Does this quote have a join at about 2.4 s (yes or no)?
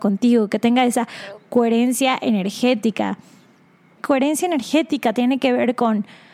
no